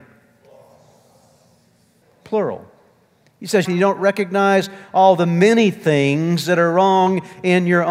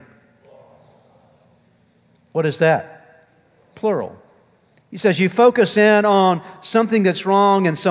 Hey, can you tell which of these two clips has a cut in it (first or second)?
first